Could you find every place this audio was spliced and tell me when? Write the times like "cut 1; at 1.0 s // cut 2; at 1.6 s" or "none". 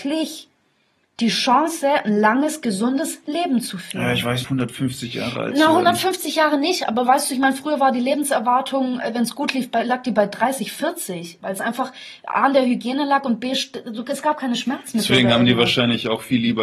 cut 1; at 4.4 s // cut 2; at 11.4 s